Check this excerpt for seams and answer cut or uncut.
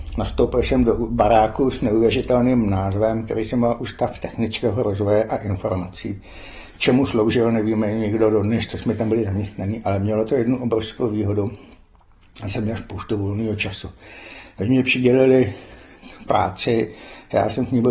uncut